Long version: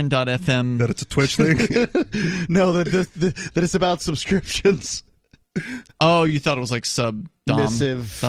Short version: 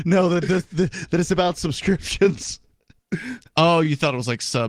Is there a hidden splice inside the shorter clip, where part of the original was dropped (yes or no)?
no